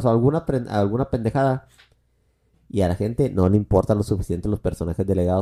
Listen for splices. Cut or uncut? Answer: cut